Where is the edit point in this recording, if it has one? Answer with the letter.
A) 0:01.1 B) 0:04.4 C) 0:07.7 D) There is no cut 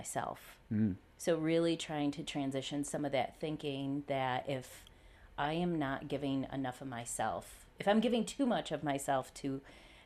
C